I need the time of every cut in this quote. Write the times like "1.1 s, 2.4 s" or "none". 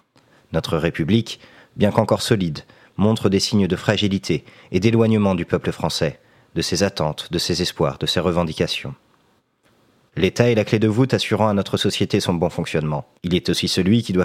13.2 s